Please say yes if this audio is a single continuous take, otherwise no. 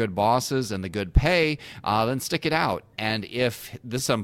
yes